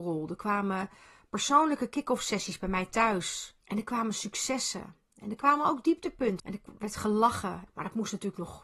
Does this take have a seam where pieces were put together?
yes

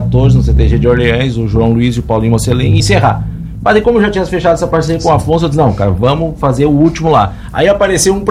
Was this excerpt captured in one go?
no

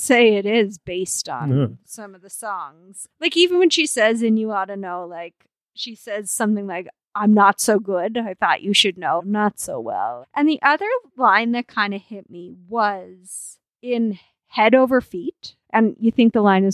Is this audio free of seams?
no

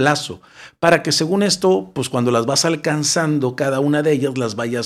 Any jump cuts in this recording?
no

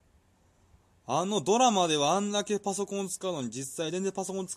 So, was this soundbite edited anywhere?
no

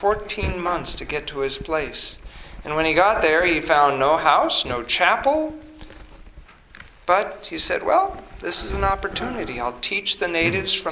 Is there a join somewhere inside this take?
no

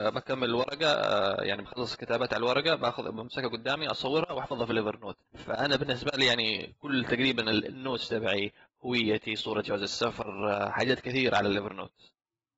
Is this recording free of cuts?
no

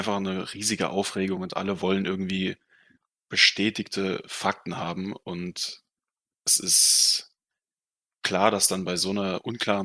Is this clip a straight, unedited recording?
yes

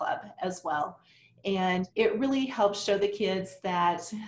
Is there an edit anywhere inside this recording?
yes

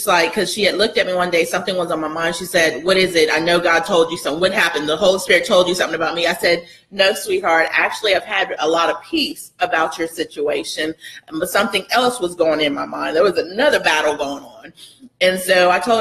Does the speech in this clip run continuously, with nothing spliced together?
yes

